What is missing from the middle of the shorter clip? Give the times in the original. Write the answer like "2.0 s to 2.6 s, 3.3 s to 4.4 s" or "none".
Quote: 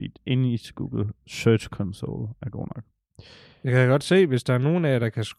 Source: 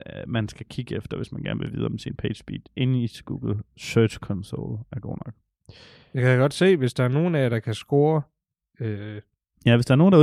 none